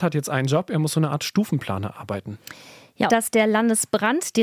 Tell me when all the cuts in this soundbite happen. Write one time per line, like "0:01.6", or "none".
0:03.1